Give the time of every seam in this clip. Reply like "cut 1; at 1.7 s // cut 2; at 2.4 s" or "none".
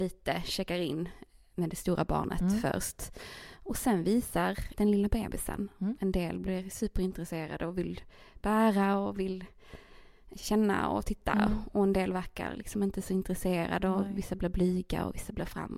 cut 1; at 4.7 s // cut 2; at 6.0 s